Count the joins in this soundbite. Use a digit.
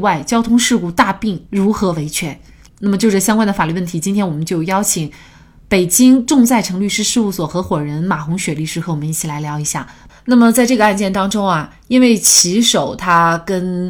1